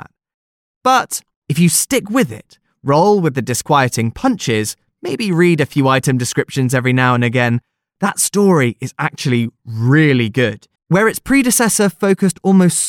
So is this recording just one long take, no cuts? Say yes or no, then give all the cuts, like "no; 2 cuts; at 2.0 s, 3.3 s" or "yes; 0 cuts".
no; 2 cuts; at 1.3 s, 10.8 s